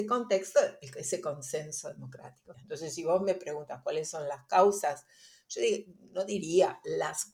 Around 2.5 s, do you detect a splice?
yes; 1 cut; at 2.5 s

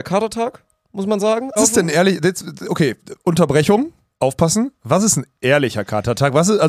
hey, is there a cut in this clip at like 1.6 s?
yes; 1 cut; at 1.6 s

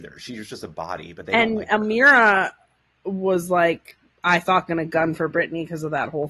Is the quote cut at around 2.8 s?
no; 0 cuts

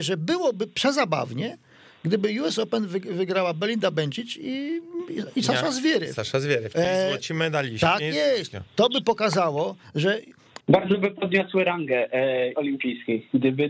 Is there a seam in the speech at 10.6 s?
yes; 2 cuts; at 10.6 s, 12.5 s

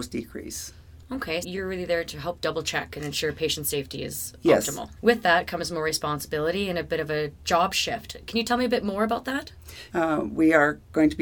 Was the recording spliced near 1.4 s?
yes; 3 cuts; at 1.4 s, 5.0 s, 9.9 s

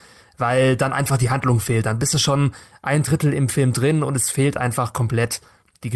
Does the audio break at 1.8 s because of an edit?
no; 0 cuts

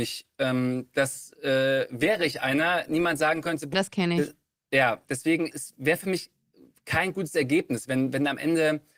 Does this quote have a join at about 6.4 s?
no; 2 cuts; at 3.7 s, 5.1 s

